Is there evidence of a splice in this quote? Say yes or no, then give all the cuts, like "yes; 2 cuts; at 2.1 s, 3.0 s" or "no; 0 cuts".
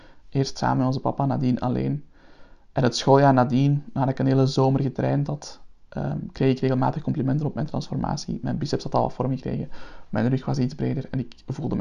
no; 0 cuts